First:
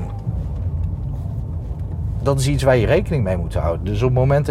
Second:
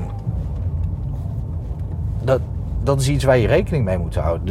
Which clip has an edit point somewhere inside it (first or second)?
first